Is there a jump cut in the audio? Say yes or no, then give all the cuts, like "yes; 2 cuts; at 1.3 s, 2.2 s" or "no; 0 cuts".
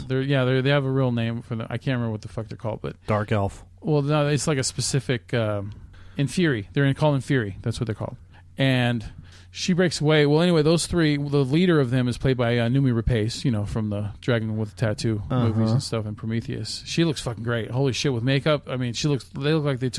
no; 0 cuts